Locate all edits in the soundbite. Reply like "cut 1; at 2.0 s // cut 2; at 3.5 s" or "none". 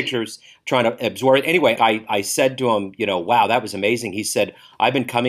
cut 1; at 1.8 s